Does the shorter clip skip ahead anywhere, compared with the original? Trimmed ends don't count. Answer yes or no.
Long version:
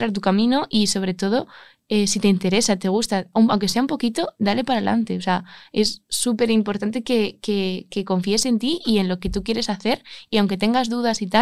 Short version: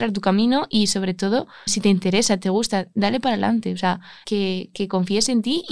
yes